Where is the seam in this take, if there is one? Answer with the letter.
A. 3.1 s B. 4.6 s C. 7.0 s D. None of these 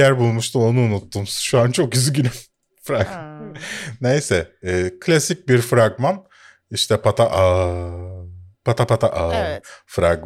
C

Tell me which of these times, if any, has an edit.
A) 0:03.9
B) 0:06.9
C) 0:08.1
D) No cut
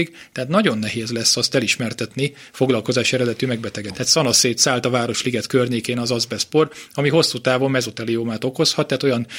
A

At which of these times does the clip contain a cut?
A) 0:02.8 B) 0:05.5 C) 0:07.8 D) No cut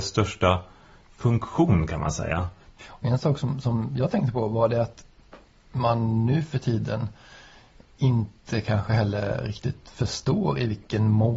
A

